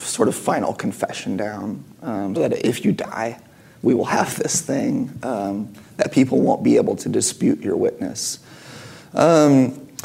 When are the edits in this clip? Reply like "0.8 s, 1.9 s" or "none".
2.4 s